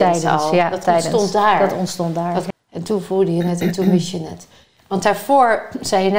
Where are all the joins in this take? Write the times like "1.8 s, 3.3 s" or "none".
2.5 s